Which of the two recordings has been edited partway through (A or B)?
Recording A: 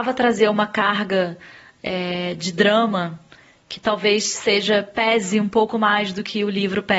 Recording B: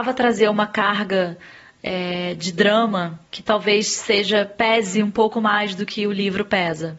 B